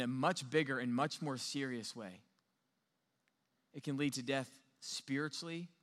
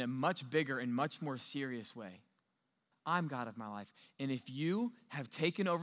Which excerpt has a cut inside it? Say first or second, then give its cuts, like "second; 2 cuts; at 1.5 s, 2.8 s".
second; 1 cut; at 2.9 s